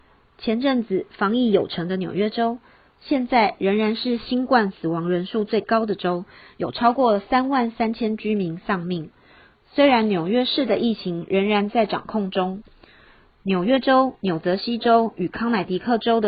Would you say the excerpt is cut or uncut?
uncut